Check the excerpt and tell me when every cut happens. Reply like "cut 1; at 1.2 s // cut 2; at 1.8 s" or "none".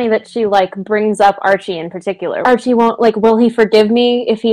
cut 1; at 2.4 s